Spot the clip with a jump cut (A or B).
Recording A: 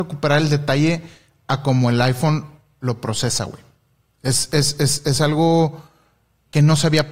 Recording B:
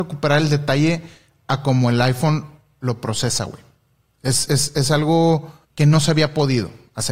B